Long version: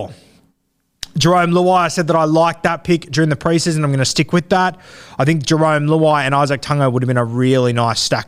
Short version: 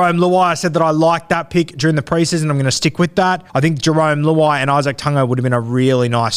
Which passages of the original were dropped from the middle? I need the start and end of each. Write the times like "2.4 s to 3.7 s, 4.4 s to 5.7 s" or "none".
4.8 s to 5.1 s